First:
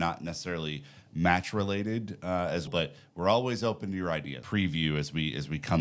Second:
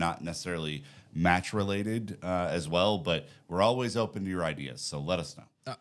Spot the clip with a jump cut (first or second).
first